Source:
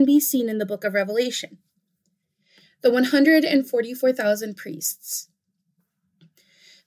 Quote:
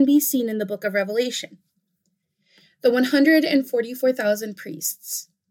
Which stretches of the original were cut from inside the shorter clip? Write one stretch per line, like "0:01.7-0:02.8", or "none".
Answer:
none